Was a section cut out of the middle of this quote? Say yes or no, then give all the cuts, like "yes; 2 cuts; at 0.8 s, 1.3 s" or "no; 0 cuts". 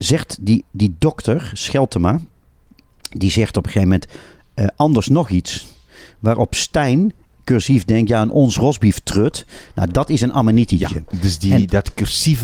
no; 0 cuts